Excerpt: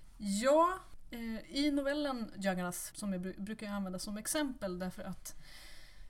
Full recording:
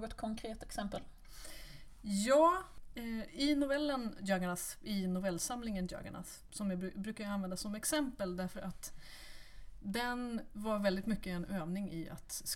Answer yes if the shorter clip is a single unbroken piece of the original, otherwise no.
no